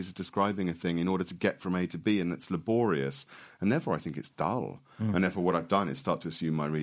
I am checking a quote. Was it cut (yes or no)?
no